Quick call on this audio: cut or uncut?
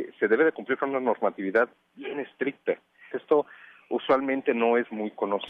cut